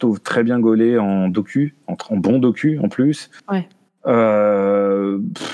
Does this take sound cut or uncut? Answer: uncut